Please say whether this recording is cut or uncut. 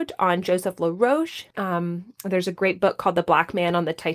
cut